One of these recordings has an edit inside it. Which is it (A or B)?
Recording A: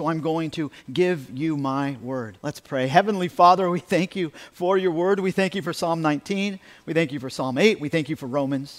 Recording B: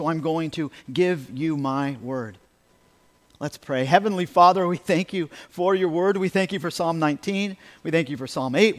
A